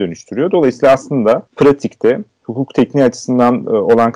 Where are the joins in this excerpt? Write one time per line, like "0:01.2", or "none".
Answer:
0:01.5

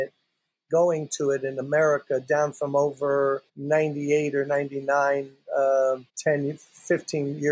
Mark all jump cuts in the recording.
0:03.5
0:06.1

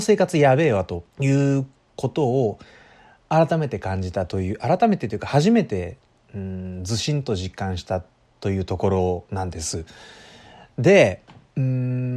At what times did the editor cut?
0:01.1

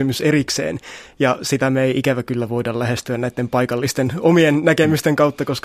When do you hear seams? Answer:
none

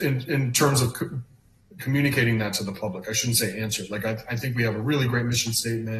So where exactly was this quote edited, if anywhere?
none

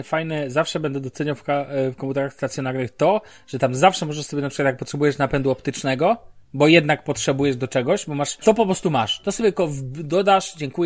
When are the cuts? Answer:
0:08.4

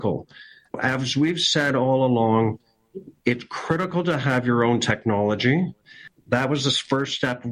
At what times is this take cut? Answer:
none

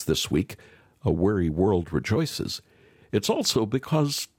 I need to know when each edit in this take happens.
none

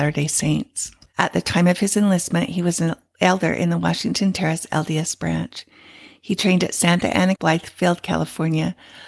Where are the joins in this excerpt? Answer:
0:01.1
0:07.4

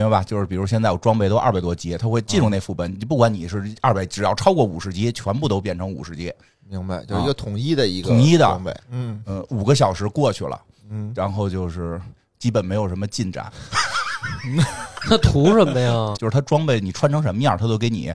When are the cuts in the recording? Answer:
0:08.8
0:16.1

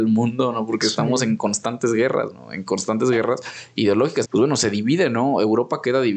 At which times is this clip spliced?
0:04.2

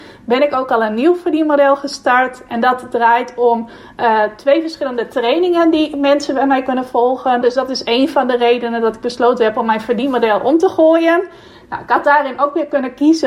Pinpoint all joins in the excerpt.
0:07.4

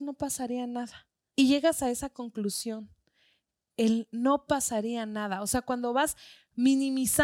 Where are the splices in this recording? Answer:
0:01.3

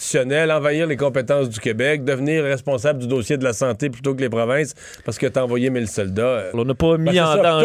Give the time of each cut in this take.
0:06.5

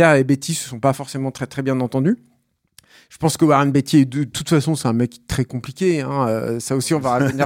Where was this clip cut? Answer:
none

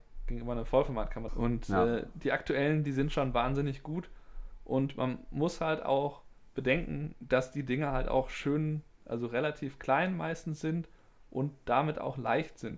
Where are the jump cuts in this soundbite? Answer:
0:01.3

